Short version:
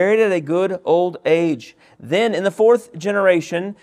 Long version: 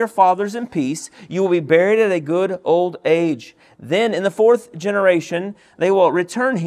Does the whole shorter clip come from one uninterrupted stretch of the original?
yes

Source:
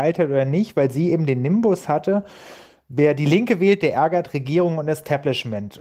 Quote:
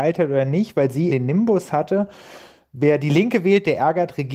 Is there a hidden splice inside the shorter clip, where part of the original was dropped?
yes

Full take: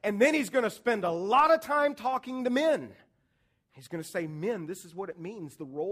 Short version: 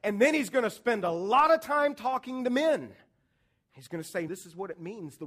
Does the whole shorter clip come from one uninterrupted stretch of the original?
no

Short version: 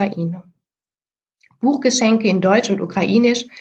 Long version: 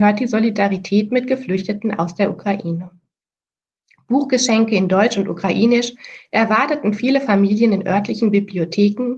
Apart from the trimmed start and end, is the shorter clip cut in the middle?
no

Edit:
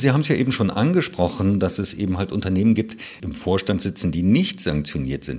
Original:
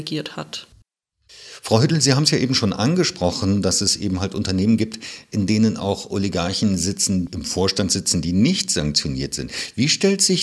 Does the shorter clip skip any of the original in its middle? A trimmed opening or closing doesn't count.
yes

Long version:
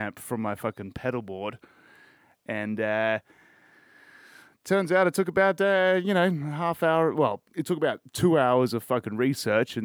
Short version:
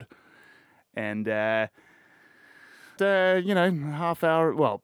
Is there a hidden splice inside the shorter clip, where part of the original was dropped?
yes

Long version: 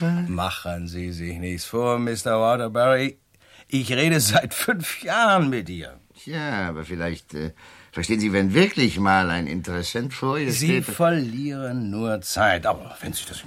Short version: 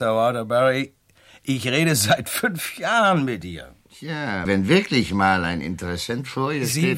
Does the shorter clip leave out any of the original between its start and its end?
yes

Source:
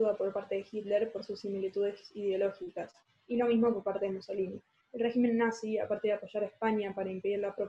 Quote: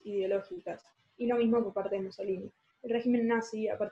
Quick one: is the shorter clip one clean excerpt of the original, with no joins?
yes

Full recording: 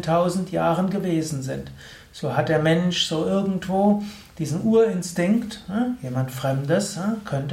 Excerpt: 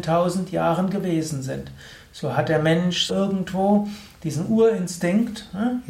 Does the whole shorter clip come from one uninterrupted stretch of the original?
no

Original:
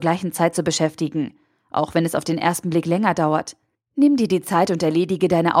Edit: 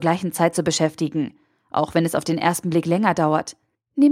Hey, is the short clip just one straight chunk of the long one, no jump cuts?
yes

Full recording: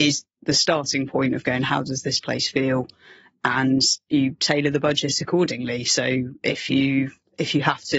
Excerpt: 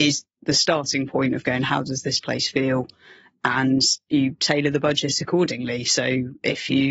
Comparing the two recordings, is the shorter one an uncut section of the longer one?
yes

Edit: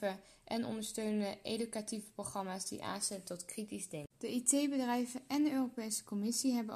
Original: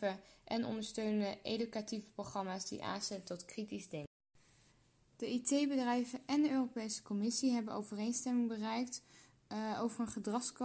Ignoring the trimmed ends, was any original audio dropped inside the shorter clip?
yes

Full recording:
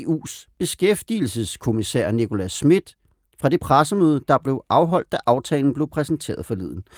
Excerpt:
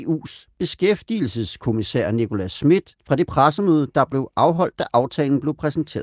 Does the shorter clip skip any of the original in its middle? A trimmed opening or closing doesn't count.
yes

